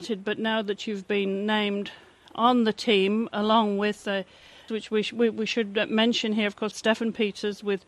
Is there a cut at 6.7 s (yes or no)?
yes